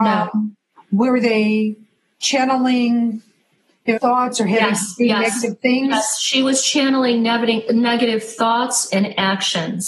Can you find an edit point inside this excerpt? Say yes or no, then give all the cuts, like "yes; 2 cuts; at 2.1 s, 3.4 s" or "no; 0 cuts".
yes; 2 cuts; at 4.0 s, 8.9 s